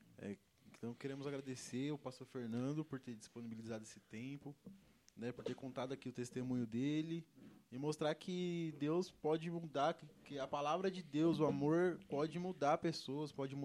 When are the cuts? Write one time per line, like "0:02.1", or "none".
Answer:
none